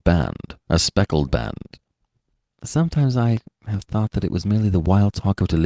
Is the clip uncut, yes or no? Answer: yes